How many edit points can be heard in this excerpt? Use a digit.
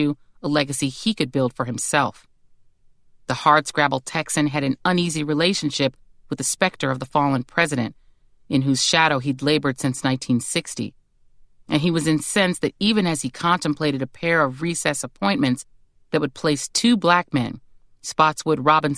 0